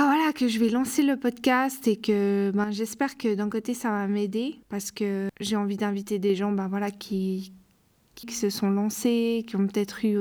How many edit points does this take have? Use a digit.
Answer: 2